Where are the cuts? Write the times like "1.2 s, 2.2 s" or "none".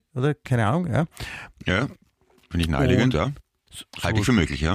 3.7 s